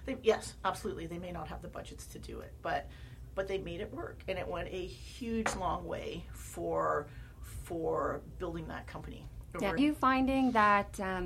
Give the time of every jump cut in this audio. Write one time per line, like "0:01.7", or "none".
0:09.8

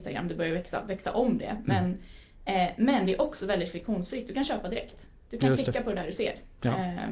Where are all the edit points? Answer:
none

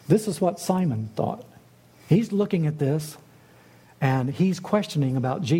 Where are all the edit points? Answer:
none

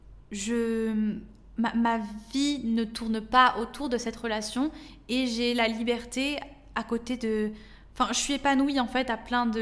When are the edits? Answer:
none

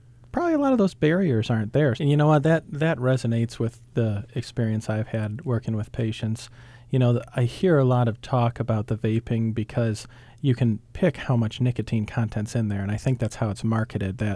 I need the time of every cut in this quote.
0:02.0

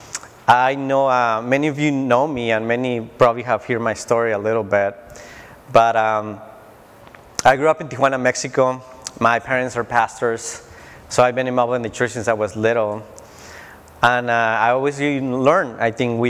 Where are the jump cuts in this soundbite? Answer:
none

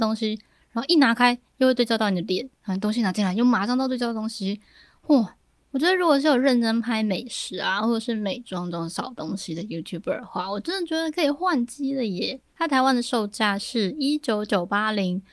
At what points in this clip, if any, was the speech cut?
none

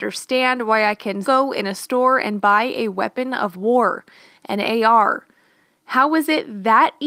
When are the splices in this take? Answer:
0:01.2

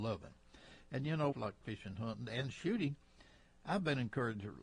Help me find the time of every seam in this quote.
0:01.3

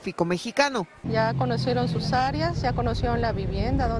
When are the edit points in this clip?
0:01.0

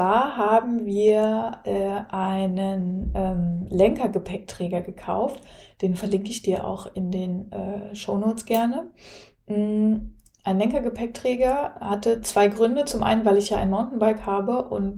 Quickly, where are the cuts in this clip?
none

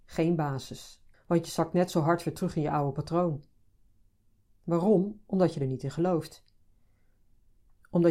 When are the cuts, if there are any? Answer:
0:01.1

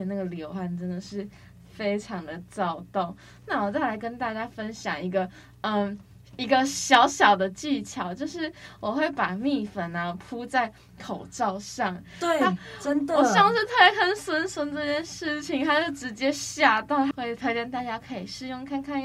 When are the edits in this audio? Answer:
0:17.1

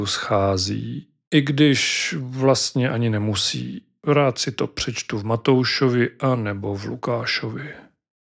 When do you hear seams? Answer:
0:01.2

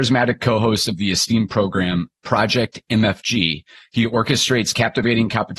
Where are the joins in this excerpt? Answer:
none

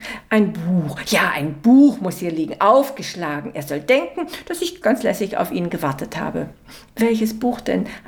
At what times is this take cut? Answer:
0:04.8

